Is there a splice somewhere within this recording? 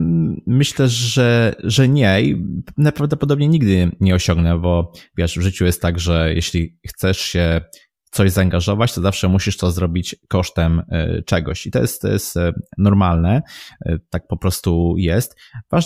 no; 0 cuts

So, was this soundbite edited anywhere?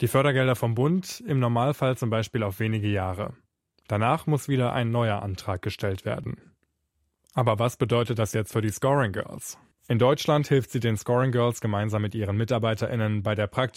yes; 1 cut; at 9.7 s

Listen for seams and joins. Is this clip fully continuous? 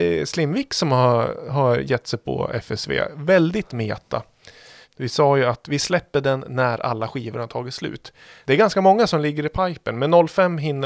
no; 2 cuts; at 4.8 s, 8.4 s

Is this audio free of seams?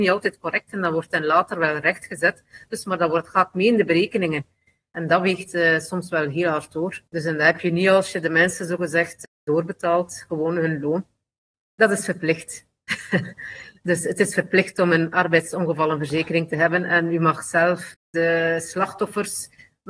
no; 2 cuts; at 7.1 s, 11.5 s

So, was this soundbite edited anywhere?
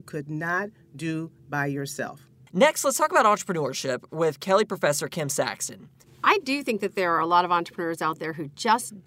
no; 0 cuts

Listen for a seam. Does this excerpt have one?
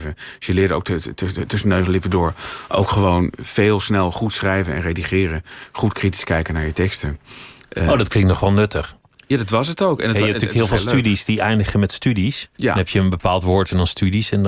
yes; 1 cut; at 12.5 s

